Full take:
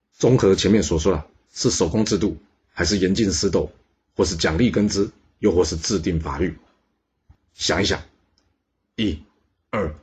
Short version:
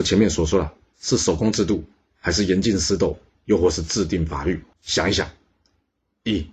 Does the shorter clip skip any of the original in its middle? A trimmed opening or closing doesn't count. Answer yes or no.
yes